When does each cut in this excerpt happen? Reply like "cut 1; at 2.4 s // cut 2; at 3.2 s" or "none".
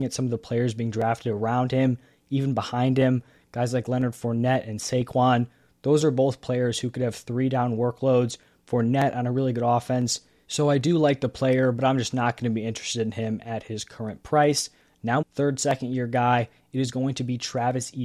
cut 1; at 10.4 s // cut 2; at 15.2 s